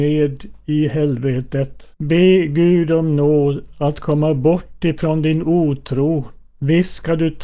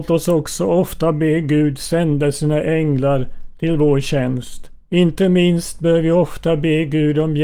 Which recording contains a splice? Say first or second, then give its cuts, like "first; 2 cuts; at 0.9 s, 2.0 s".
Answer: first; 1 cut; at 1.9 s